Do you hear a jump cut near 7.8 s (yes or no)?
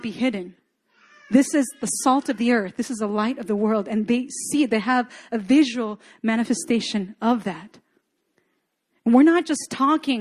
no